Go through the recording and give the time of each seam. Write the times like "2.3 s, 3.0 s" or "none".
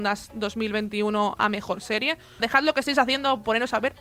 2.4 s